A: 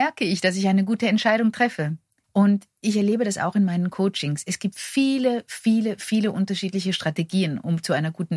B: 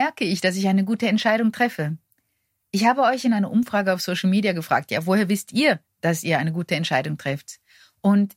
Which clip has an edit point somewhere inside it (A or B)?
A